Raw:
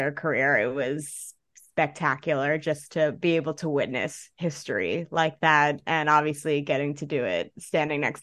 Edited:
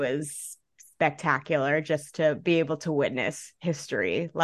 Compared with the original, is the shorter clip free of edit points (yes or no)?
yes